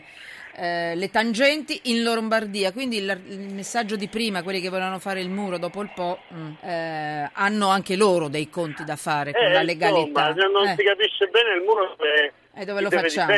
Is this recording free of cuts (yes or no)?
no